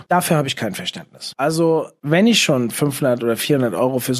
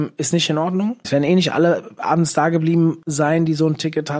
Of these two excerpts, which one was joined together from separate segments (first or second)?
second